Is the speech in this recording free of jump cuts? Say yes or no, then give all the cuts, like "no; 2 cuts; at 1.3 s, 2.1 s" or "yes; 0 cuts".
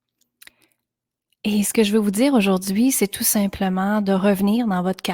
yes; 0 cuts